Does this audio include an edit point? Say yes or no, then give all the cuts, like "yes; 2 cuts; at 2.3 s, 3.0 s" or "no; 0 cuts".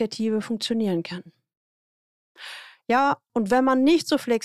yes; 1 cut; at 3.3 s